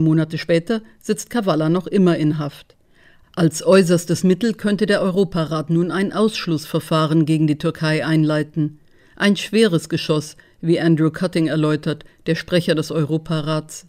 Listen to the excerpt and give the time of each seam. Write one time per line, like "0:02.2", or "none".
none